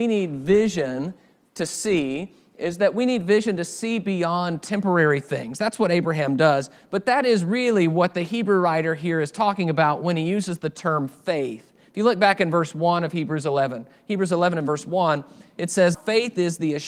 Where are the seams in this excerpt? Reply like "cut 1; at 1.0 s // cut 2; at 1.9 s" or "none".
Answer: cut 1; at 15.9 s

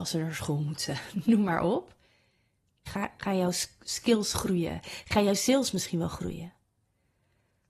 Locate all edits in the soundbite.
cut 1; at 2.9 s

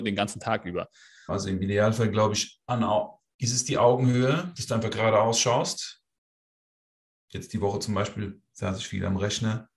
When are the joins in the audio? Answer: cut 1; at 1.3 s

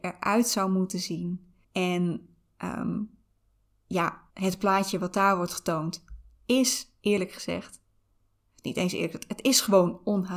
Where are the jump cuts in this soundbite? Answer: cut 1; at 1.6 s // cut 2; at 4.3 s

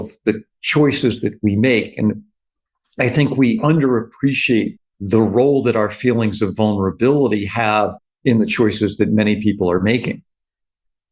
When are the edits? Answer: cut 1; at 4.8 s

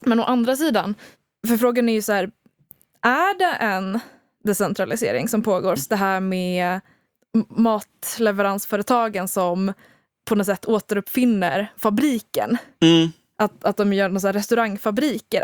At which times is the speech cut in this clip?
cut 1; at 5.8 s

